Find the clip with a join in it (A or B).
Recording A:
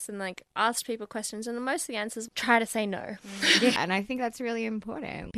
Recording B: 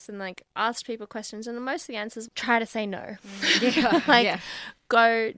A